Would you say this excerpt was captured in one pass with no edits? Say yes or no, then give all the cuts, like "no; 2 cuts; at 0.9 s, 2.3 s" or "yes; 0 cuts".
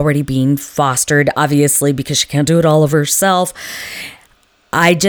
yes; 0 cuts